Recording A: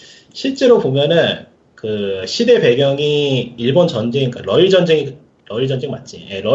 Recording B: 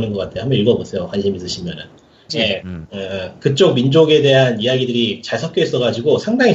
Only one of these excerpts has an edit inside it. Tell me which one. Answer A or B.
B